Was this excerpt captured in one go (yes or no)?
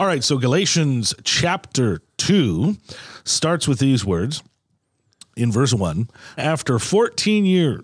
no